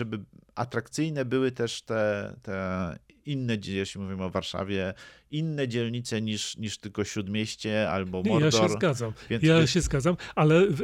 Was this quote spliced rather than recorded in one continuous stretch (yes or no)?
no